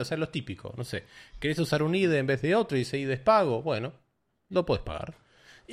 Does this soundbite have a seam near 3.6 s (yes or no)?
no